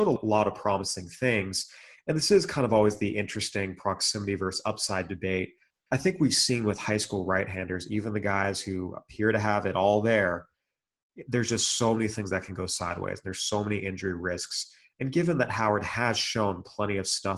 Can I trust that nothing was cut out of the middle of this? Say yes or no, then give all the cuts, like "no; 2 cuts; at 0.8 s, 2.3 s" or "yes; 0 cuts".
yes; 0 cuts